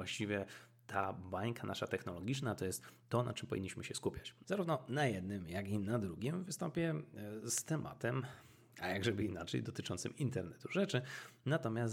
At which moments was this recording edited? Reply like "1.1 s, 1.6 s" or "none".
4.4 s